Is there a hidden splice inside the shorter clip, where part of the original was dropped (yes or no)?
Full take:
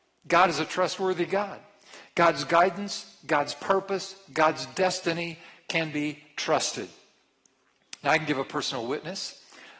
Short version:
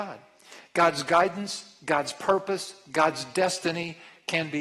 no